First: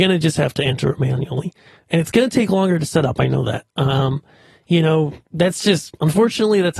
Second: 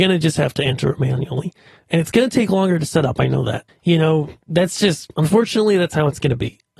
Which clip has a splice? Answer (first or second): second